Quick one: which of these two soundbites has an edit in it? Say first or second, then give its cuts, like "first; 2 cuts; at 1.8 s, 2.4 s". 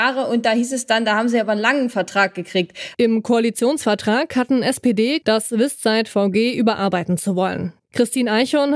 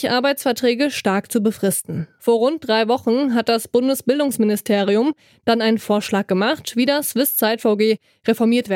first; 3 cuts; at 2.9 s, 5.2 s, 7.8 s